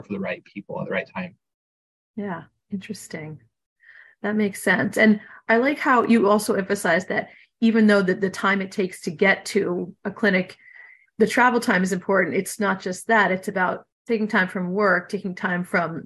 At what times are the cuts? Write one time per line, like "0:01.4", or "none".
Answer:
none